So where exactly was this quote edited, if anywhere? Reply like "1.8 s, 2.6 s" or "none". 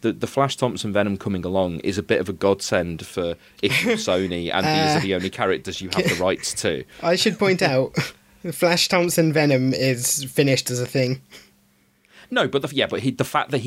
none

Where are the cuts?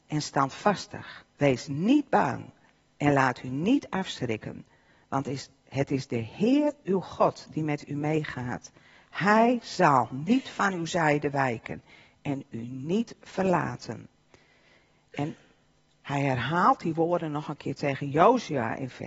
1.3 s

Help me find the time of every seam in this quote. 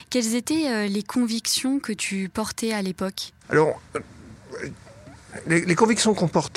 3.4 s

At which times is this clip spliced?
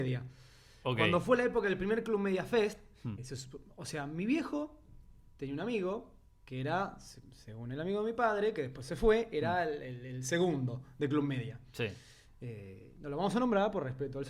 3.2 s

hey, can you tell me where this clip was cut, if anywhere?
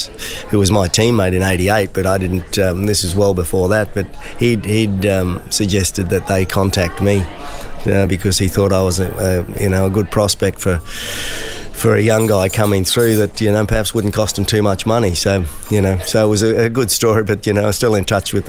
none

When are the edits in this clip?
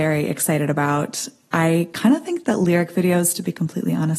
none

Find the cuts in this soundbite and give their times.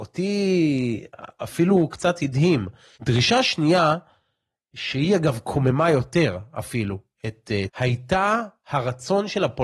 2.9 s, 7.7 s

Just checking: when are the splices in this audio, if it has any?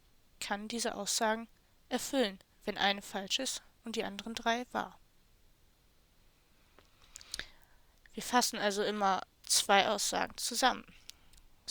8.0 s, 9.3 s

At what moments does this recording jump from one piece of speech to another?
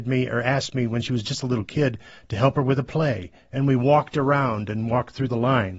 none

